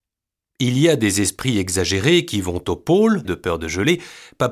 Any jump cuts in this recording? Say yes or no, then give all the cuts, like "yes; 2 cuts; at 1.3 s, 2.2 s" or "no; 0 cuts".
yes; 1 cut; at 3.2 s